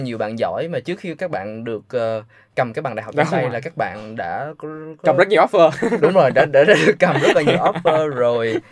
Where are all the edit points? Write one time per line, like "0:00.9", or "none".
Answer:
none